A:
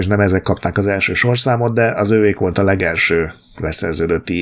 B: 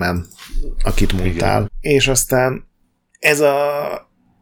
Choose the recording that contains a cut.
B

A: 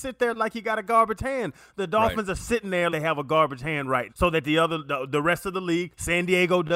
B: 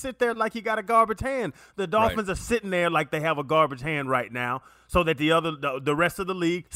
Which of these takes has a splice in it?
A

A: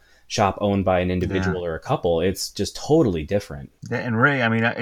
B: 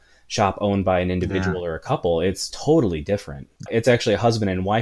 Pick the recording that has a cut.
B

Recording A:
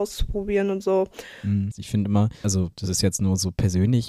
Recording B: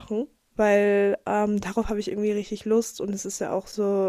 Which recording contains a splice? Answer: A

